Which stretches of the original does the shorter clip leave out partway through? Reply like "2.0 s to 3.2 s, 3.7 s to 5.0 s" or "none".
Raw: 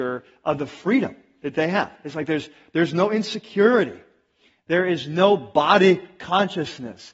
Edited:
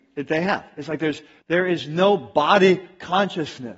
2.7 s to 4.6 s